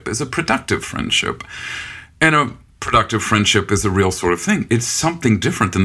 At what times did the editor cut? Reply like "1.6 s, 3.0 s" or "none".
4.7 s